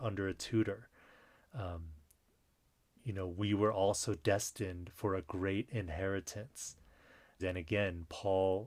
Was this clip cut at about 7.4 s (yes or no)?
yes